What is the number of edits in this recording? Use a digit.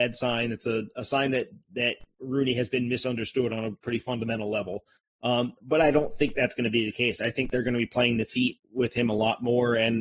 0